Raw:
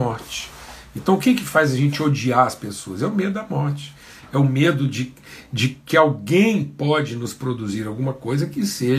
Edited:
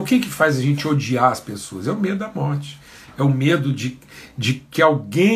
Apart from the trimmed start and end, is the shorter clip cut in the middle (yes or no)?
no